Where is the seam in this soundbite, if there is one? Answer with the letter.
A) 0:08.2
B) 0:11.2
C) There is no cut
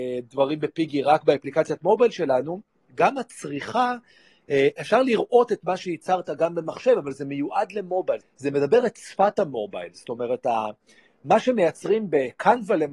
A